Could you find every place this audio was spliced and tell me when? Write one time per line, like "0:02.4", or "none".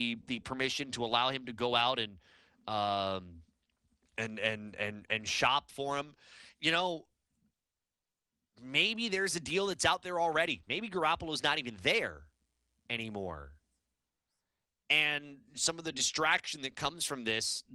none